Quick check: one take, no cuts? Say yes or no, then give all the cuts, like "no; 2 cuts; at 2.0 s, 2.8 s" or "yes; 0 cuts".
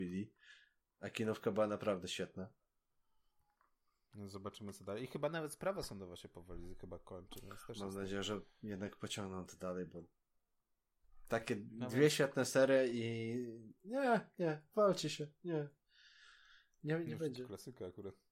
yes; 0 cuts